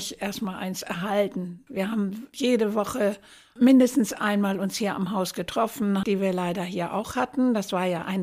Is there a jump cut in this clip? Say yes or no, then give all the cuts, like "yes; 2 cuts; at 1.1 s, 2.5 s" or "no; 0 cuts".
yes; 2 cuts; at 1.7 s, 6.0 s